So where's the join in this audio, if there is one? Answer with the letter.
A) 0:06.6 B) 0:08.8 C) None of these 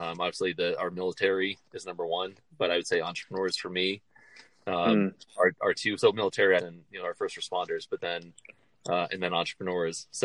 A